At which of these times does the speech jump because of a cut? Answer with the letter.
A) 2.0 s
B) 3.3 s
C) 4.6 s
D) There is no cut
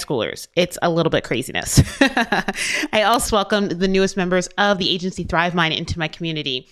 B